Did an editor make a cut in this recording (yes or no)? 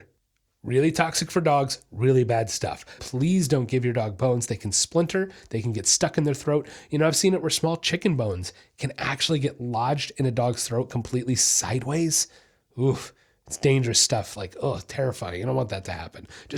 yes